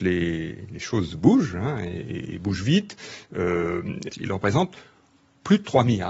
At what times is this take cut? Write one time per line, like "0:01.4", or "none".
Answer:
0:04.1